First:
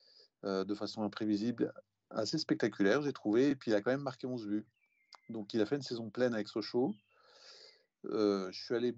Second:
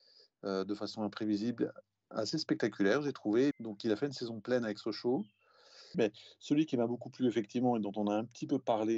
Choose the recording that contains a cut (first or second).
second